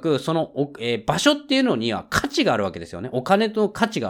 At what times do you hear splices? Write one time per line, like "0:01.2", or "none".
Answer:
none